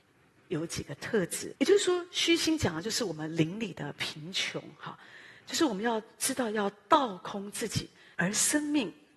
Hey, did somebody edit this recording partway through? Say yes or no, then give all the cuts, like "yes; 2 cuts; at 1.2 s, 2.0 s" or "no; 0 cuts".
yes; 2 cuts; at 1.6 s, 8.1 s